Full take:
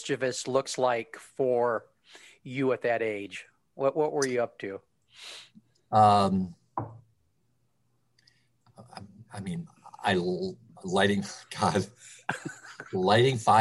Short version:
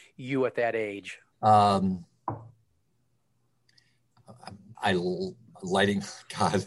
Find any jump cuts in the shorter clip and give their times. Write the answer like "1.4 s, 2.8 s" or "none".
1.3 s, 4.8 s